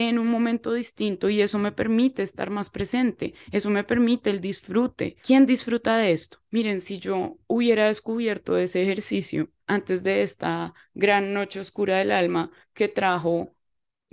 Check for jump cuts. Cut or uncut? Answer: cut